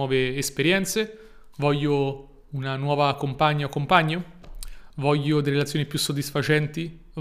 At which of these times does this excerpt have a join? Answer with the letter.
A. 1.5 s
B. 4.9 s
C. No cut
A